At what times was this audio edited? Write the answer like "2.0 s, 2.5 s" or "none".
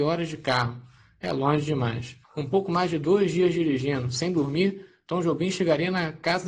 2.2 s